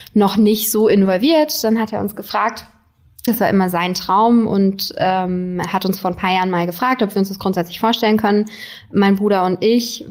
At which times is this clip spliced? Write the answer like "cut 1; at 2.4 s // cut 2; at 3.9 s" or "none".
cut 1; at 3.3 s